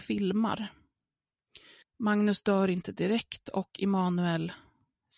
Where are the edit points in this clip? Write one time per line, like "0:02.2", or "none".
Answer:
0:01.8